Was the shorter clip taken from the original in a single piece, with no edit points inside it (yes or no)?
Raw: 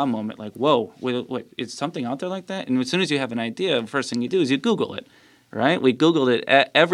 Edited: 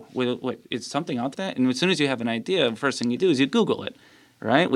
no